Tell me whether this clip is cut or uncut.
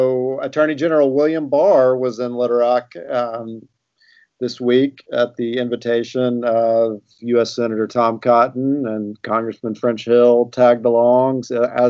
uncut